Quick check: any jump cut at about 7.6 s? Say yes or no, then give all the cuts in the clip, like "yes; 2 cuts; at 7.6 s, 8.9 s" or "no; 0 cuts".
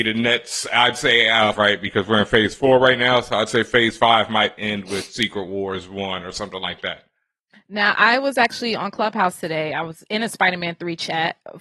no; 1 cut; at 1.5 s